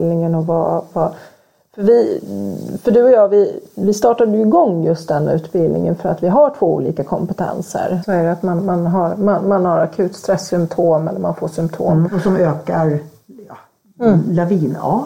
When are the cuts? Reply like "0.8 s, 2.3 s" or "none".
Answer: 8.0 s, 12.1 s